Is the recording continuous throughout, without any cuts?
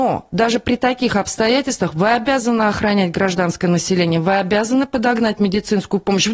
yes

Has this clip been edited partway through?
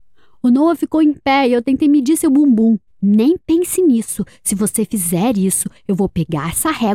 yes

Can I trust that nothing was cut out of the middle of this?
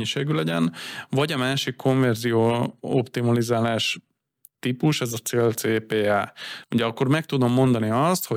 no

